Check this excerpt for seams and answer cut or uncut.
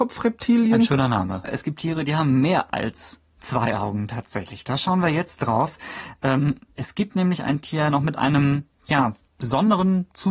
cut